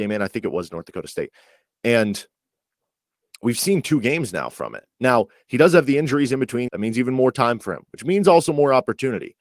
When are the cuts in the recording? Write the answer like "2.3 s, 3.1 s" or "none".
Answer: 6.7 s